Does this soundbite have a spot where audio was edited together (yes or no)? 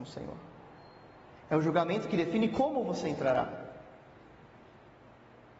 yes